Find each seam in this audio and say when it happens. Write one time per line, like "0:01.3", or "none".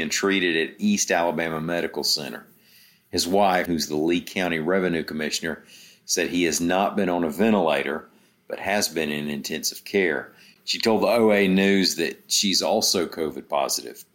0:03.7